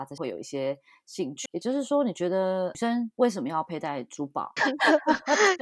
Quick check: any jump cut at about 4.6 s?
yes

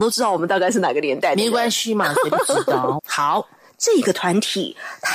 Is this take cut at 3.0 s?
yes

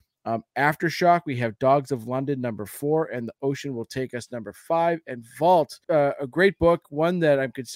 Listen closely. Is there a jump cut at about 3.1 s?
no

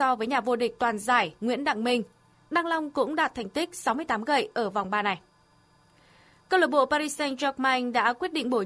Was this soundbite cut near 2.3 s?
yes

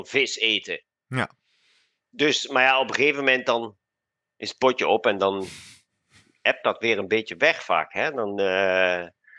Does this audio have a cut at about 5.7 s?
no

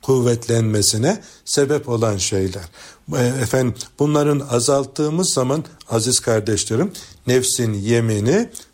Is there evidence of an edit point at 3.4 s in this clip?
no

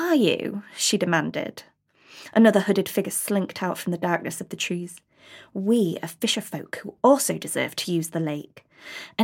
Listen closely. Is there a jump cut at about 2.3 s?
no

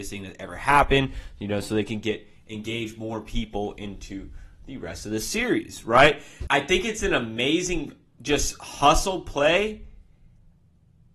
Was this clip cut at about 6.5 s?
yes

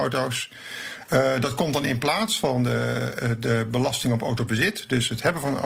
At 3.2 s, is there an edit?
no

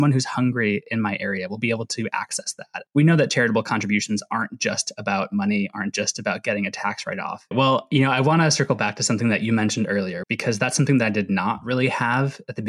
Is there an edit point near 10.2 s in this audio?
yes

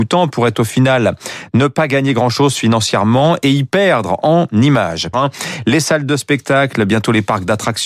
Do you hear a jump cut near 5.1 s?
yes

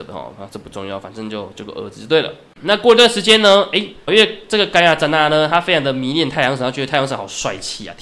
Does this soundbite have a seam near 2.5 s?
no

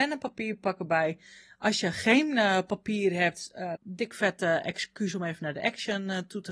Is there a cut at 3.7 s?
yes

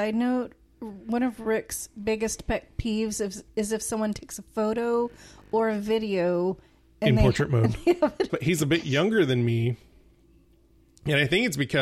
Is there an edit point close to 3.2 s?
no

